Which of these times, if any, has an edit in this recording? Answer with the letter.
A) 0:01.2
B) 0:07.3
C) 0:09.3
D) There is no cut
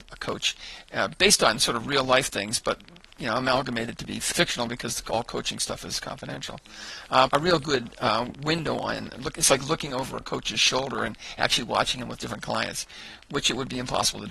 B